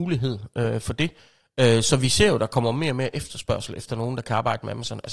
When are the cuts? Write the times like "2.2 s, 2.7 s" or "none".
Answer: none